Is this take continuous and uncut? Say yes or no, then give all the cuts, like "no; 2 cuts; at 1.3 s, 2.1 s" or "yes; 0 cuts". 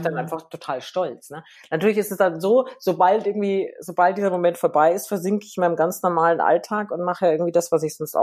yes; 0 cuts